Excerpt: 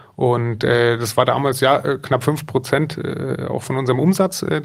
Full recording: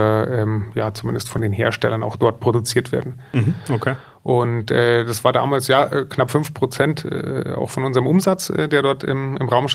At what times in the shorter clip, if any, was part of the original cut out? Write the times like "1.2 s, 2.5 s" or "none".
none